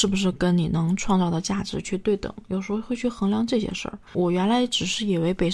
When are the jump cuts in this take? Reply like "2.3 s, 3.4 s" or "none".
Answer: 4.1 s

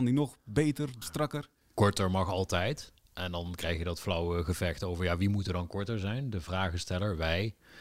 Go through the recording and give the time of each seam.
1.0 s

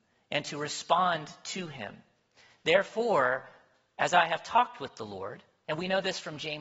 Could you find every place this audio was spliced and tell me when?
none

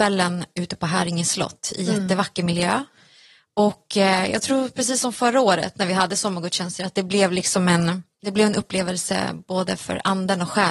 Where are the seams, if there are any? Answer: none

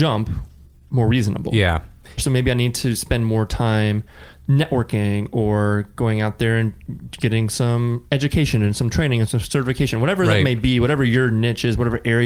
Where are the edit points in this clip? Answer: 2.2 s

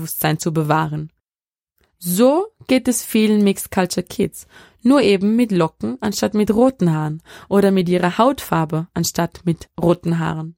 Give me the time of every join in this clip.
none

